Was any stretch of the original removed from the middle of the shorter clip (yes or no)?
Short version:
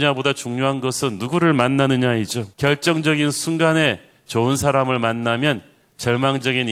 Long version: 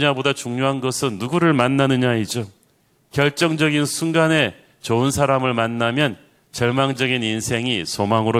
yes